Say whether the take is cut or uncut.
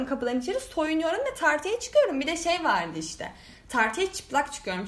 uncut